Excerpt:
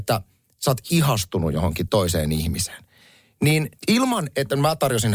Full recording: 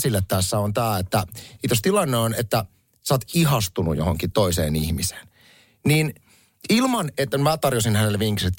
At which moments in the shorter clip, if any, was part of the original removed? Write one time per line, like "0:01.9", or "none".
0:03.8